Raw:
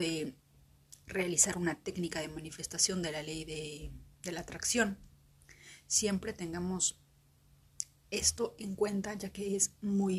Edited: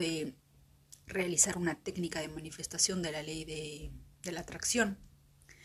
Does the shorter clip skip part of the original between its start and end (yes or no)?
no